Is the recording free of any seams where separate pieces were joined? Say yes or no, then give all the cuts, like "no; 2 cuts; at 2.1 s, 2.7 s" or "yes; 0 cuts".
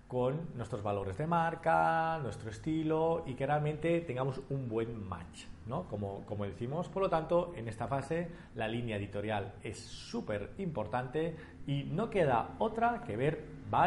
yes; 0 cuts